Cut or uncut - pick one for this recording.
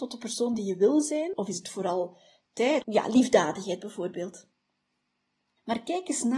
cut